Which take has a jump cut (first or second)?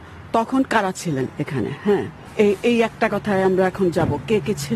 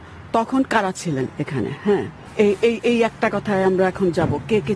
first